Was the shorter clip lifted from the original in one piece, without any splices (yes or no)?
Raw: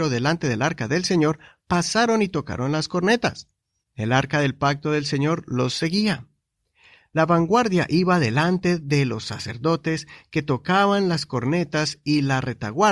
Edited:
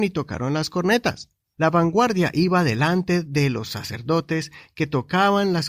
no